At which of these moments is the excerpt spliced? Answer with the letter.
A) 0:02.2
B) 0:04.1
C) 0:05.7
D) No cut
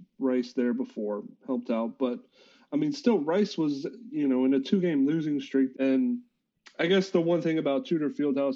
C